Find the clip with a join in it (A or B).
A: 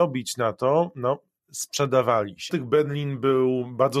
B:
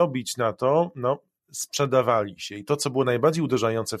A